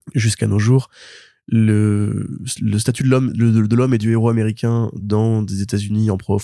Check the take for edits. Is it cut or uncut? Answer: uncut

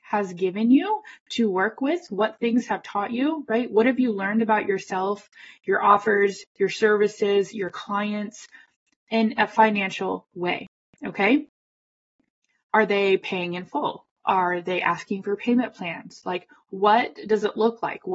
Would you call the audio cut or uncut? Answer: uncut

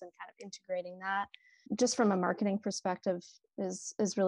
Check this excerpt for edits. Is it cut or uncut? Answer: cut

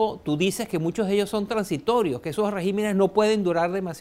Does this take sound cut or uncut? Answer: uncut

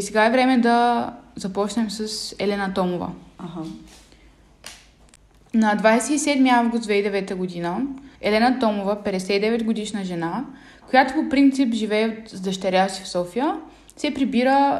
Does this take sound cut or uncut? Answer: cut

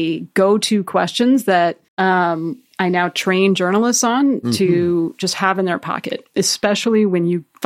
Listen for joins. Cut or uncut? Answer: cut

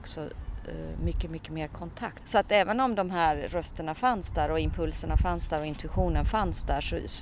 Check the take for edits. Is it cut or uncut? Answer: cut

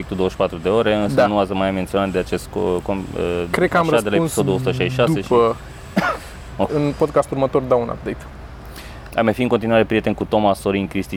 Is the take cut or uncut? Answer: cut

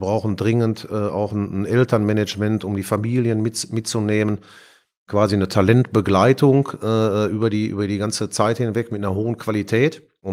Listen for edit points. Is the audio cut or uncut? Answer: uncut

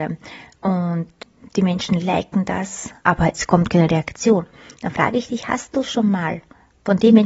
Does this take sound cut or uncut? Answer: uncut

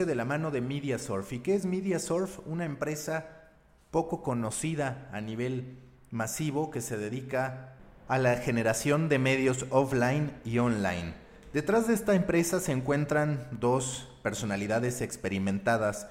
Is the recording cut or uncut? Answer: uncut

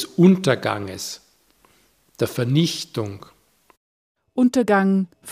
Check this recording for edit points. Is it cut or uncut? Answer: uncut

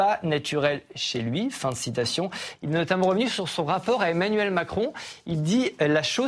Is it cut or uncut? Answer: cut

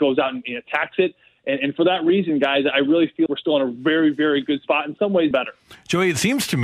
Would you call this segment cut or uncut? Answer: cut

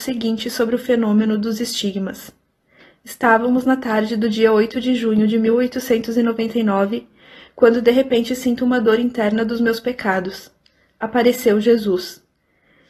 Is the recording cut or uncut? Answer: uncut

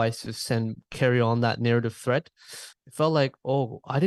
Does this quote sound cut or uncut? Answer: cut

